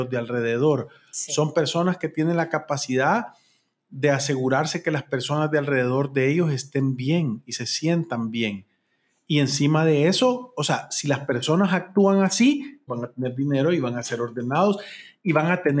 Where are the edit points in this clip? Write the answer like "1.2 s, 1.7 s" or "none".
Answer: 12.9 s